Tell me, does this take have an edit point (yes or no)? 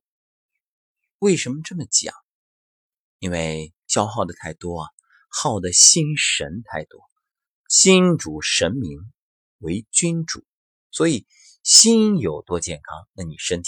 no